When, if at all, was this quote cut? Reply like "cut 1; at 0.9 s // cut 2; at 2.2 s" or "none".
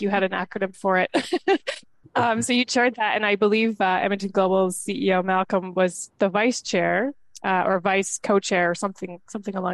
none